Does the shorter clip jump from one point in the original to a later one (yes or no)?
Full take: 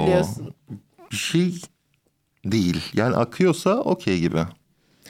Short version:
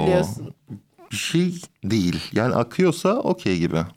yes